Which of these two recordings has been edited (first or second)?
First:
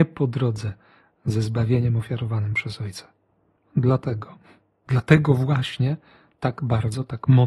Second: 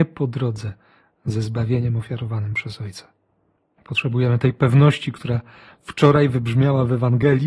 second